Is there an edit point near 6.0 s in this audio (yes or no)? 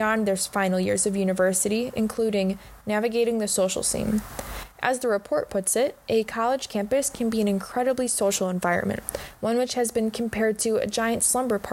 no